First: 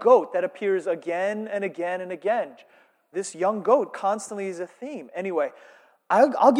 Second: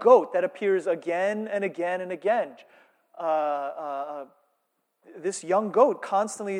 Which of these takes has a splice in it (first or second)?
first